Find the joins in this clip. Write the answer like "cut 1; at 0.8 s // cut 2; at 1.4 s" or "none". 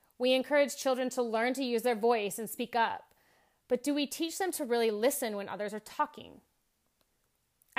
none

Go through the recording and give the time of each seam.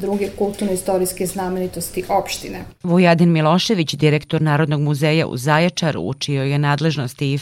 cut 1; at 2.8 s

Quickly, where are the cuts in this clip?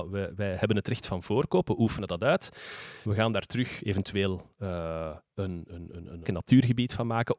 cut 1; at 3.0 s // cut 2; at 6.2 s

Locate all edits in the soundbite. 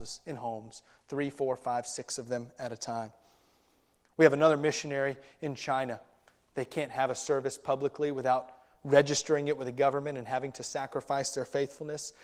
none

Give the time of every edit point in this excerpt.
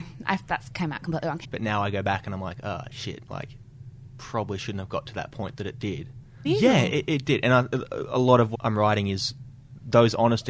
cut 1; at 1.4 s // cut 2; at 6.4 s // cut 3; at 8.5 s

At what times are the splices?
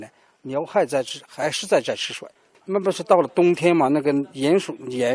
cut 1; at 2.5 s

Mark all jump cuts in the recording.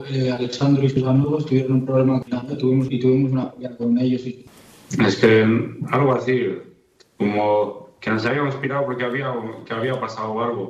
cut 1; at 2.3 s

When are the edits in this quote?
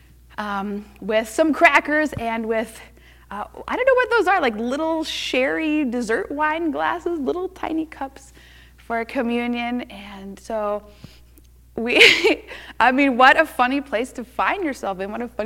none

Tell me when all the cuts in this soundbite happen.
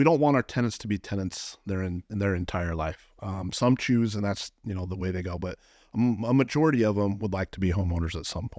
none

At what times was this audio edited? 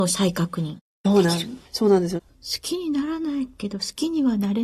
cut 1; at 2.3 s

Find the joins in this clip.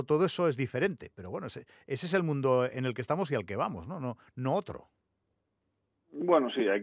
none

